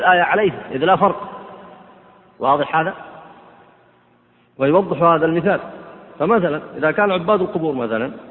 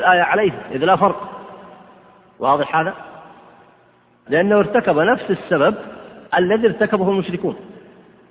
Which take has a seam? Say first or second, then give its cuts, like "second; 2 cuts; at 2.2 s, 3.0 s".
second; 2 cuts; at 4.3 s, 6.3 s